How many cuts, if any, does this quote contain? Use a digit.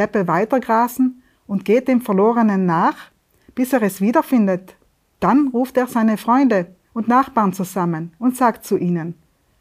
2